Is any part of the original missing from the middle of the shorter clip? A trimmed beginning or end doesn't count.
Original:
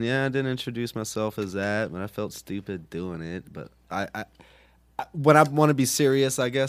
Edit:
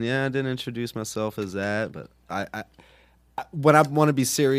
yes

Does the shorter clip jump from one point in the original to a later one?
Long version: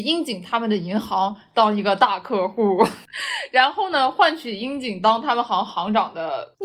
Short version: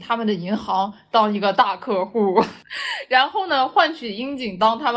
no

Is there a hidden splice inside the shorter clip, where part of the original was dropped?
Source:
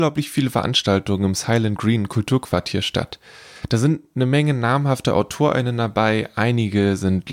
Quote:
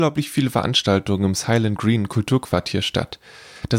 no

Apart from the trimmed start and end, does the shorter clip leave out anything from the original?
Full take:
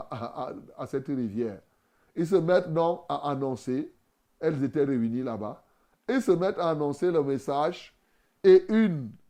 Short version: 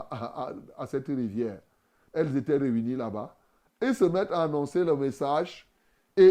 yes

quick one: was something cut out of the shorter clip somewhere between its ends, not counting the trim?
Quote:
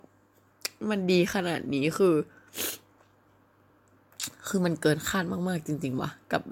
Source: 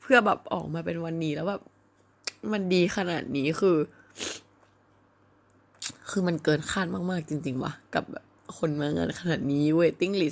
no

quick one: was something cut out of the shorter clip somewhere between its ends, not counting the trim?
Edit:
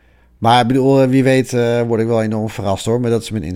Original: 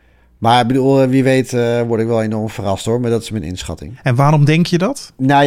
no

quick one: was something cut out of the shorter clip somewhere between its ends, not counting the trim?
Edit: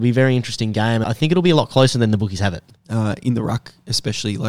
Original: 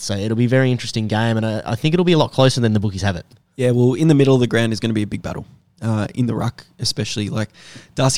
yes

